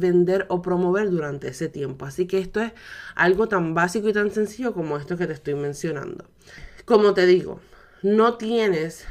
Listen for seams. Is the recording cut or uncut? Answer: uncut